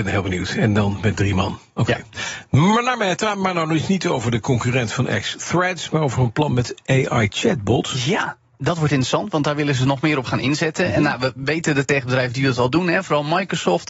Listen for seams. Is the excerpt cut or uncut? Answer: uncut